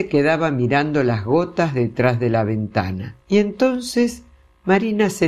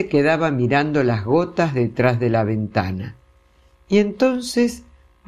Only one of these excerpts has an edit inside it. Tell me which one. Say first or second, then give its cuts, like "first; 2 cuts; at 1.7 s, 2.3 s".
first; 1 cut; at 3.2 s